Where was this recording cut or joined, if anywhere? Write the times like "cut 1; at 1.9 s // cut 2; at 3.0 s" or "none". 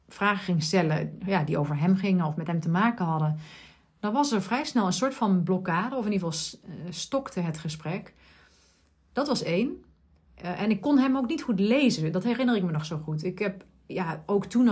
none